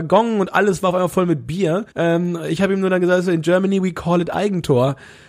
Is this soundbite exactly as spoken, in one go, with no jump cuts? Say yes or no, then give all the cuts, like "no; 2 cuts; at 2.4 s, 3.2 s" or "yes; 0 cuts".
no; 1 cut; at 1.9 s